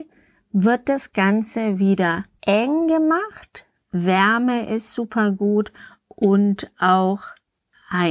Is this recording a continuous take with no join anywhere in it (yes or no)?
no